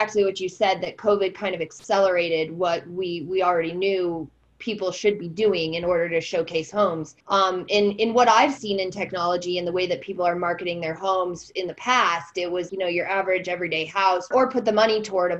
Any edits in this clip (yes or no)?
yes